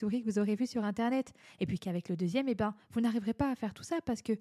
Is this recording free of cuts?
yes; 0 cuts

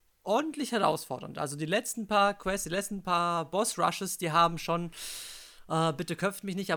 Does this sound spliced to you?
no; 0 cuts

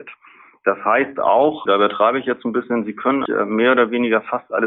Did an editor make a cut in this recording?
yes; 2 cuts; at 1.7 s, 3.3 s

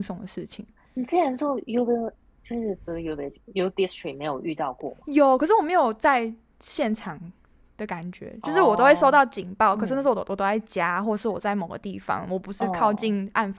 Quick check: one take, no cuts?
yes; 0 cuts

